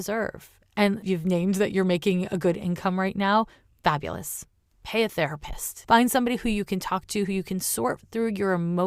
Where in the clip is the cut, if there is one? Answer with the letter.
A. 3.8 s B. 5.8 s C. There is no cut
B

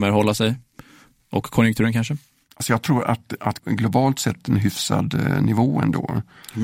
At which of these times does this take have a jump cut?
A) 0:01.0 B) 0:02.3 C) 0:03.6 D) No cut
C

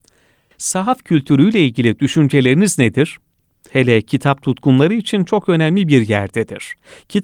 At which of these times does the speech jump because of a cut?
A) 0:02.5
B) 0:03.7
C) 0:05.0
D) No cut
B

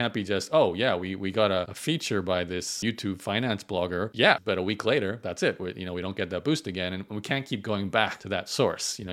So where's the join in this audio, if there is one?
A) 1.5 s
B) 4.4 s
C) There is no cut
B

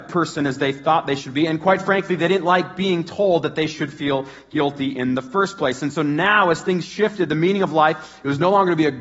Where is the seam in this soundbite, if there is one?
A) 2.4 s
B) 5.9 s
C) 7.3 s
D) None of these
B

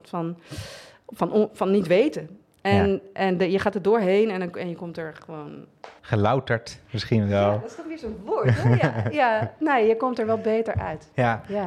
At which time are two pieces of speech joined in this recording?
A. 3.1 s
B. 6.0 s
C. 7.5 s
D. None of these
B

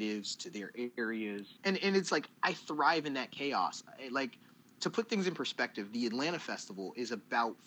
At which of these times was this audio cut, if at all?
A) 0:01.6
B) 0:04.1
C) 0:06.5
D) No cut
A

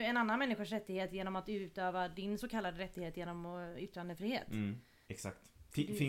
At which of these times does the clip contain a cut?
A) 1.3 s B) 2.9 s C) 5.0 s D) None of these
C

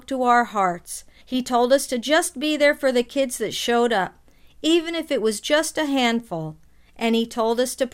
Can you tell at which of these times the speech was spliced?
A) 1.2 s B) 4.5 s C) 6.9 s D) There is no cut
A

